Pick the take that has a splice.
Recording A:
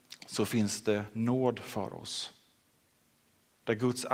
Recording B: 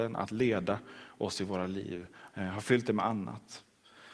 B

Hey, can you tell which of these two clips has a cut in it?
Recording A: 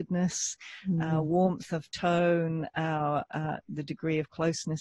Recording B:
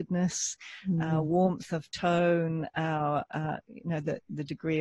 A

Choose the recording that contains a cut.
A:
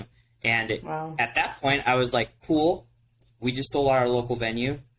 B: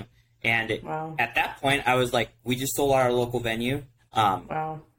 B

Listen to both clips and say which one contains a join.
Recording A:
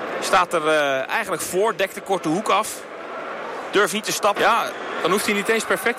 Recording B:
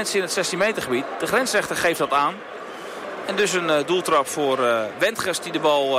A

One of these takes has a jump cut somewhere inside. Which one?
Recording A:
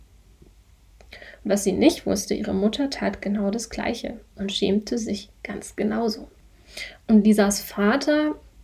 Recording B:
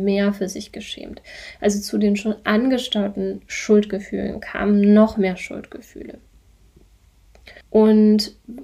B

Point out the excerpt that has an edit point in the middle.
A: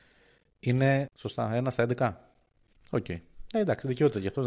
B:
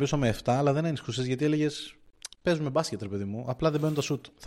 A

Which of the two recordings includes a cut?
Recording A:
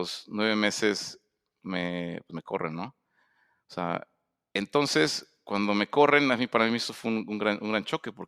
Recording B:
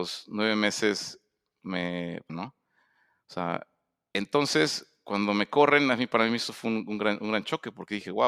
B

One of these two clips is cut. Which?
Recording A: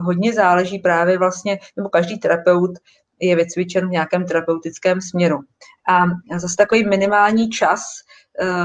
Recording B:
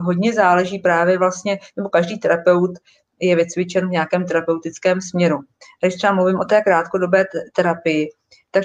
A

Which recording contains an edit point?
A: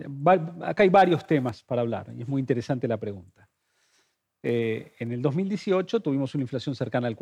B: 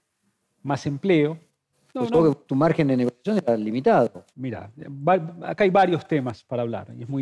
B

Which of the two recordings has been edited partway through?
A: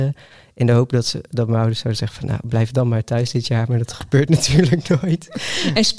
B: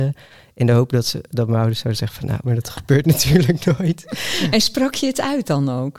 B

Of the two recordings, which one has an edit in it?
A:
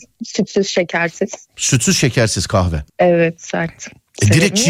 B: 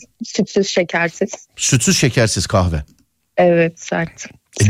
A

